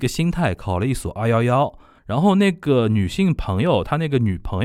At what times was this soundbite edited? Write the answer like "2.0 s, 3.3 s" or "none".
2.0 s